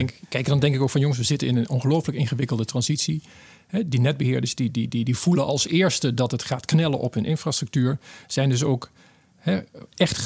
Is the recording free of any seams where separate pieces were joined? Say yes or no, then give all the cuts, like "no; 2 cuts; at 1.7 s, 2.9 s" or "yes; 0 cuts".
yes; 0 cuts